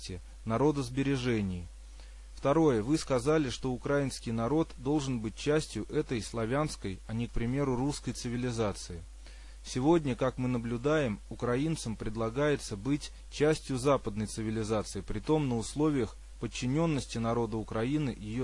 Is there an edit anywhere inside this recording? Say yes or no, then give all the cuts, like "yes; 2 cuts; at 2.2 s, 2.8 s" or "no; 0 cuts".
yes; 1 cut; at 2.3 s